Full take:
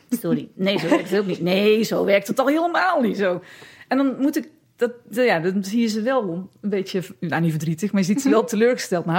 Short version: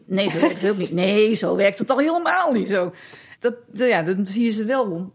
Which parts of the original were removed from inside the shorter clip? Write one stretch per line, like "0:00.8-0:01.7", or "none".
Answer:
0:03.8-0:04.7